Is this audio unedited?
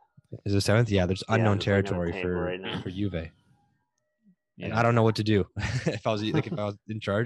yes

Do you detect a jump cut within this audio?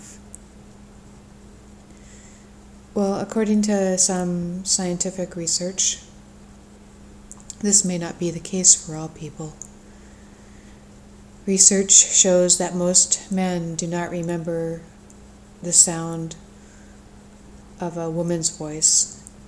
yes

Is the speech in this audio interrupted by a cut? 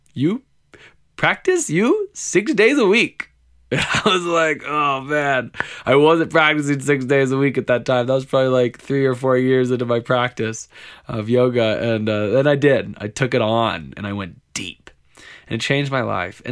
no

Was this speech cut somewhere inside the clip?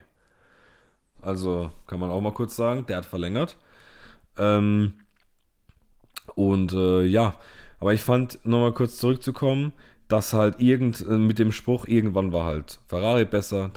yes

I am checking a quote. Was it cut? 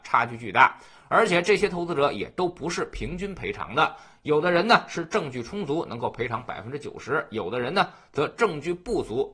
no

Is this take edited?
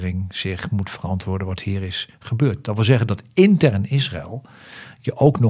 no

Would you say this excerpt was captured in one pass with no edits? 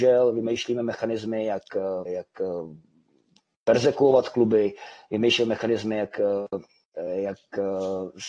no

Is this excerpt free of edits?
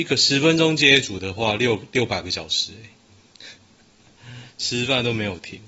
yes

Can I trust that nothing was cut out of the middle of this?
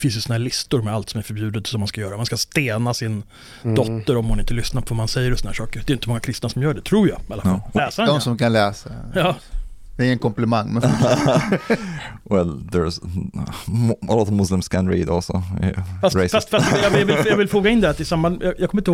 no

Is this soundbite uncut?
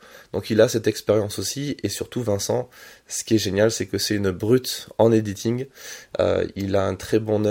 yes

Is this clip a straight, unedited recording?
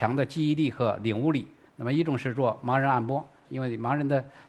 no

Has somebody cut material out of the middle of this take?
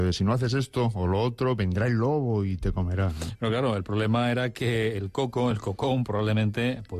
no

